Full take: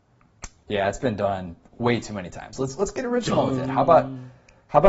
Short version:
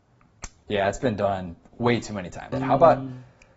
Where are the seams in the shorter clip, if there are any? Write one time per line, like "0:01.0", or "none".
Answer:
0:02.5